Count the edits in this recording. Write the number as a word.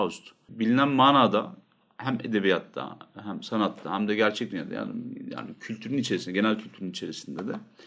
zero